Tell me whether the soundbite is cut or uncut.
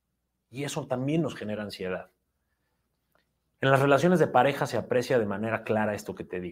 uncut